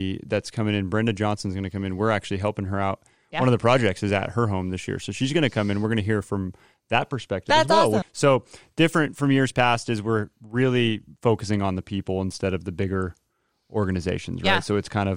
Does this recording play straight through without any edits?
no; 1 cut; at 8.0 s

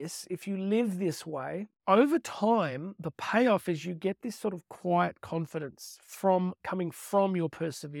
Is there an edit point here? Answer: no; 0 cuts

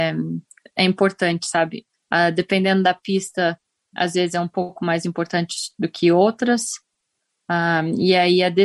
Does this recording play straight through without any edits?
no; 1 cut; at 1.9 s

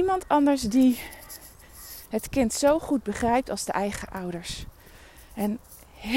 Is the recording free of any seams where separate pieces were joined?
yes; 0 cuts

